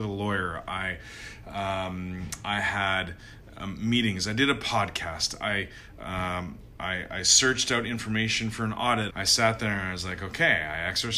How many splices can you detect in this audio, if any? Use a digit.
1